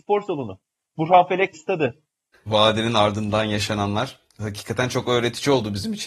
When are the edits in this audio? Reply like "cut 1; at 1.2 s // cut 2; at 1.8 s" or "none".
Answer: cut 1; at 2.3 s